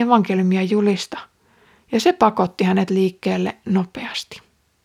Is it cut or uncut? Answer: uncut